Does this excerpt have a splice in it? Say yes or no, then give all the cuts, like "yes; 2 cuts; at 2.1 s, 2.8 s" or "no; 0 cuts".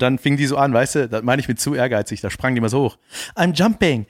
no; 0 cuts